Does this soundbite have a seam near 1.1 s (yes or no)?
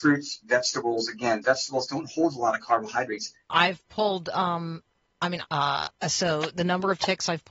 no